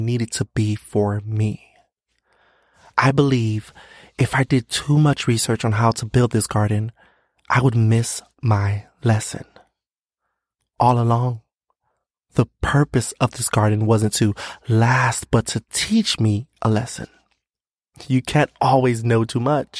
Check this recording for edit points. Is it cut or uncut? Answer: uncut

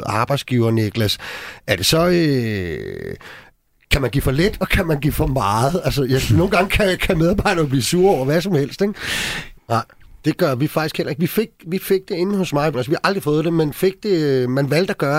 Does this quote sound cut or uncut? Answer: cut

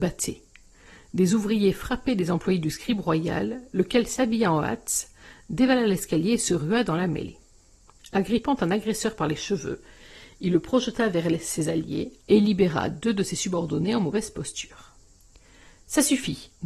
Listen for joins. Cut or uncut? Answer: uncut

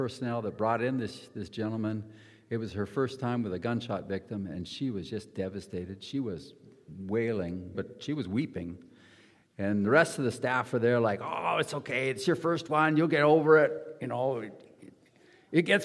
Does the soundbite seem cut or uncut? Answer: cut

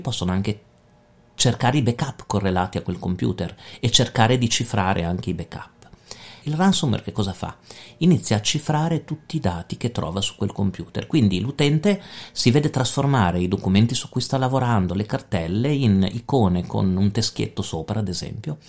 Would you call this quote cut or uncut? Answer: cut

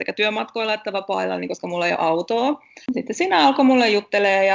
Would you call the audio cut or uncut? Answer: cut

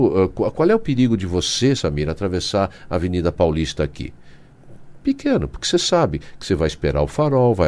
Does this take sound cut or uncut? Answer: uncut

